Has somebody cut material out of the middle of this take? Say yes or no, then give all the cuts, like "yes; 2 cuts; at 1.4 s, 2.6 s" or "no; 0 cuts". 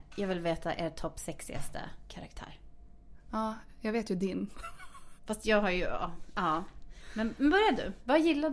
yes; 1 cut; at 5.2 s